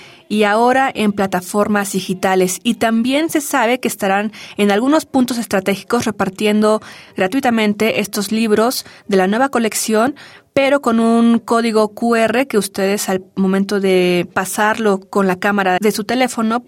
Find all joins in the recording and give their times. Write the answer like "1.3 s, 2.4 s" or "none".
15.8 s